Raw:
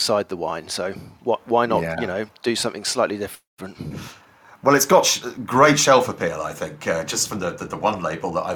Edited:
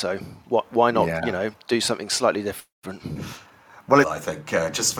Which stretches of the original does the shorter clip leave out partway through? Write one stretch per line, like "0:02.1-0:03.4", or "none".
0:04.8-0:06.4